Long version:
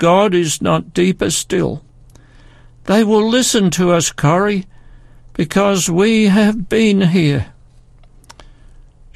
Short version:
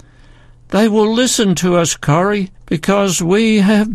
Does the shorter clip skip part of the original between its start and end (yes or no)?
yes